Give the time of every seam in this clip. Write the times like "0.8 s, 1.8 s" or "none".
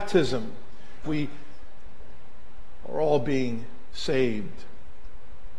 1.0 s